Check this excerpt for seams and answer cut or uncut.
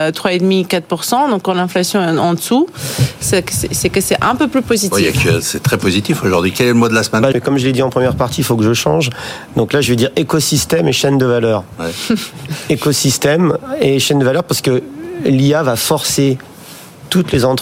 cut